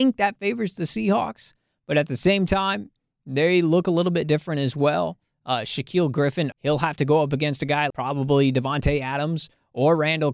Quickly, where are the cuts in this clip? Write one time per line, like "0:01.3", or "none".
0:06.5
0:07.9